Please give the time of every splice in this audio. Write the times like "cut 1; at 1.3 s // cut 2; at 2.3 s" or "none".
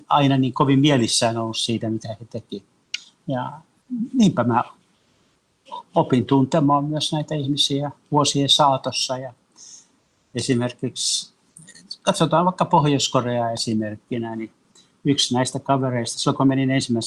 none